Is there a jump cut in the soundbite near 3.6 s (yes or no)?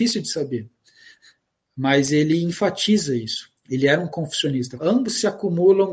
yes